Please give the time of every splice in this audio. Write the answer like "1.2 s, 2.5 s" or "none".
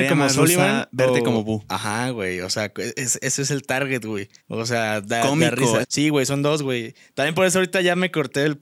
4.4 s, 5.8 s